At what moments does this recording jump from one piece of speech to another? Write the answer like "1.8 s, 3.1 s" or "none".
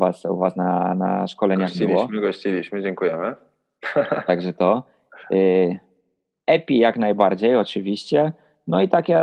none